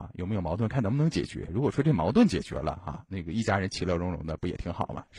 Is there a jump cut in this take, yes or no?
no